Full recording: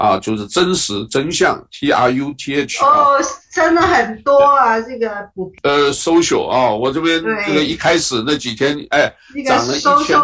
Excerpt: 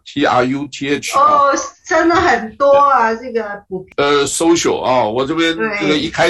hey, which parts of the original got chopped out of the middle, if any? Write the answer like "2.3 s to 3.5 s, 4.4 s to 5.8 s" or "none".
none